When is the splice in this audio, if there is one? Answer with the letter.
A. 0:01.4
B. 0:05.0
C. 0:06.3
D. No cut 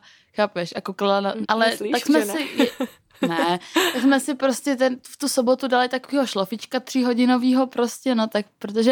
A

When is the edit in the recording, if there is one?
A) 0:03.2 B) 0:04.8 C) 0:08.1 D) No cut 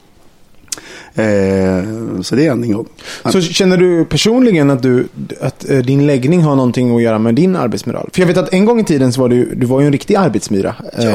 D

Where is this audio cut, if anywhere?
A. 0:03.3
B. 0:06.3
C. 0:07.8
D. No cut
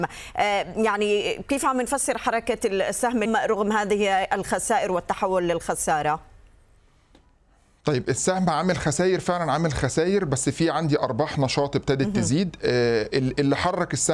A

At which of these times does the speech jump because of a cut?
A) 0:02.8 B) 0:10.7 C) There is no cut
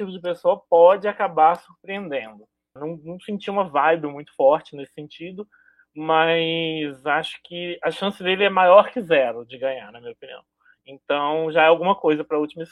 A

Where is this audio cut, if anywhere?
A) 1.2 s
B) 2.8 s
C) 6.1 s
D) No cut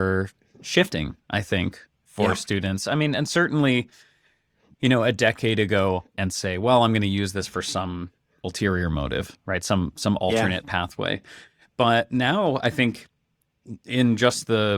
C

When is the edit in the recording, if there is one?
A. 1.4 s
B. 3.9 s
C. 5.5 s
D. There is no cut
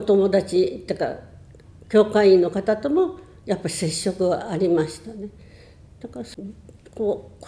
D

